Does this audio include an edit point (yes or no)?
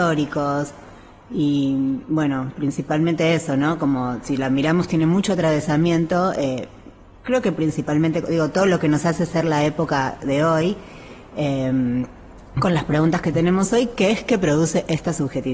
no